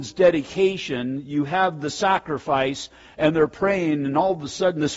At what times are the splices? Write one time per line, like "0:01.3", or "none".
none